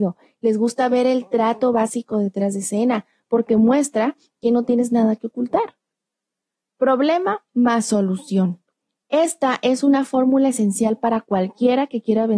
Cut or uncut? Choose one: uncut